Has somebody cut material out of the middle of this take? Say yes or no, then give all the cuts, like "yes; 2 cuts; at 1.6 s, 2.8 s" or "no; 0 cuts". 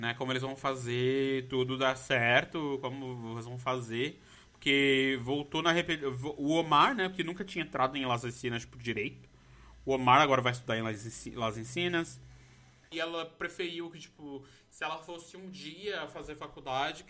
yes; 1 cut; at 12.9 s